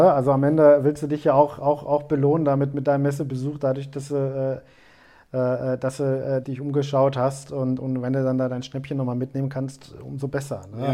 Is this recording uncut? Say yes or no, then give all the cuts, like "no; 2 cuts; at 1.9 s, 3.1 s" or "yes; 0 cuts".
no; 1 cut; at 6.4 s